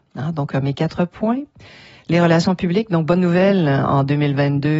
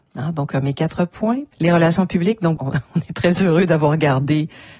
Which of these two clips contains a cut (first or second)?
second